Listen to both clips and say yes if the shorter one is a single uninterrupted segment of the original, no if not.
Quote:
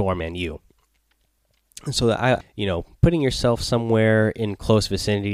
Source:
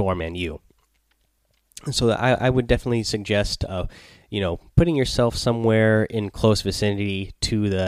no